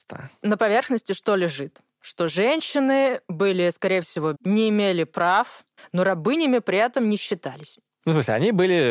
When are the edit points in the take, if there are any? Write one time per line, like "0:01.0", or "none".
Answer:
0:04.3
0:05.8

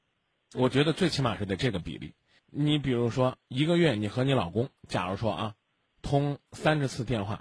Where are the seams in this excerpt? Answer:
0:02.4

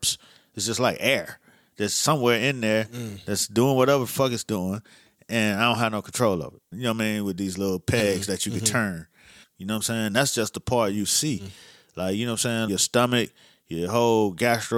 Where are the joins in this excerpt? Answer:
0:06.7
0:09.4
0:12.7

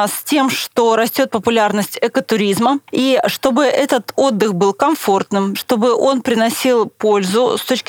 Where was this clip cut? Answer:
0:02.8
0:05.5

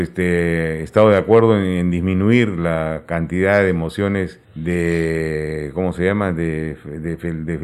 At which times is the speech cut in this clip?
0:04.4

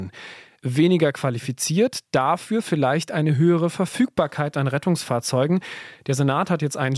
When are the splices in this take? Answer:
none

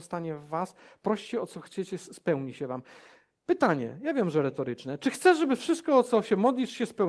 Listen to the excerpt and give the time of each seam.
none

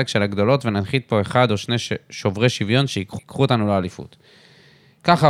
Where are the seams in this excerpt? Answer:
0:03.2

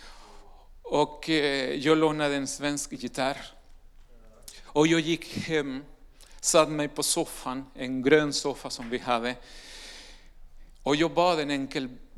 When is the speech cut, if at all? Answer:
none

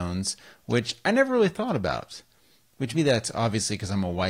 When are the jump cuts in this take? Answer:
0:02.9

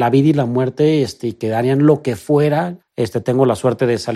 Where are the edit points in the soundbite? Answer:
0:02.8

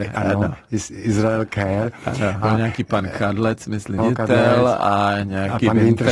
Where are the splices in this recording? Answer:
0:02.4
0:04.0

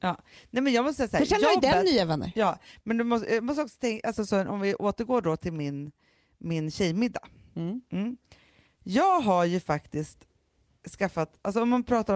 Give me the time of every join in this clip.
none

